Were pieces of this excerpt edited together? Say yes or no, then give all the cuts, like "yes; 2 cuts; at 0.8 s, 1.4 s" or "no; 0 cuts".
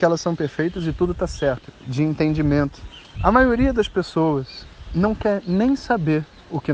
yes; 2 cuts; at 1.7 s, 3.1 s